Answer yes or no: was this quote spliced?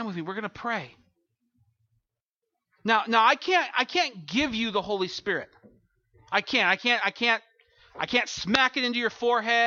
no